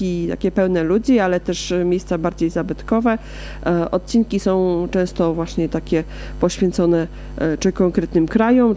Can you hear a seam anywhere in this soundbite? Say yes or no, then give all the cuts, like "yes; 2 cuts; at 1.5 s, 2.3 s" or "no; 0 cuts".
no; 0 cuts